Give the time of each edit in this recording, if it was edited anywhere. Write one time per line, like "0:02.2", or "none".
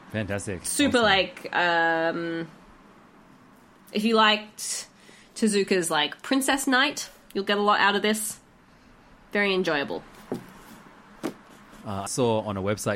0:12.1